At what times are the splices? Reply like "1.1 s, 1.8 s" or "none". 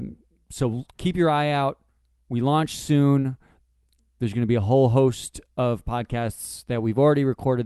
none